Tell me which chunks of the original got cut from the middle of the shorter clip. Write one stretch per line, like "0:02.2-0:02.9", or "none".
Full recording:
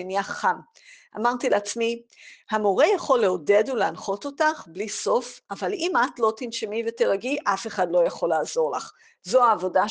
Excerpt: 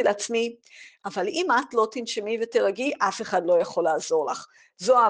0:02.4-0:05.4